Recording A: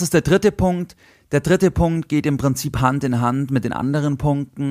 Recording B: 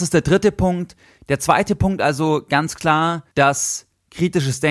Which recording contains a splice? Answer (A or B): B